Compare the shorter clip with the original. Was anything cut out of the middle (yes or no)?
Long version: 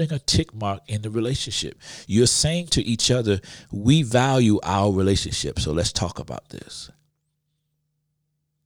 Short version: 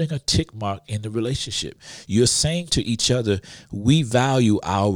no